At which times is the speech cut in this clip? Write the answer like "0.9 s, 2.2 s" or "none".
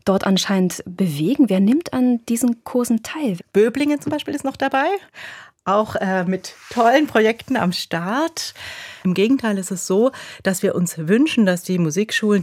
3.4 s, 9.0 s